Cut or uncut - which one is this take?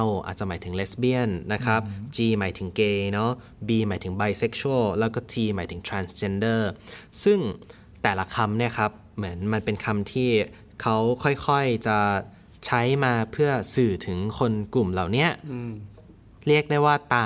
uncut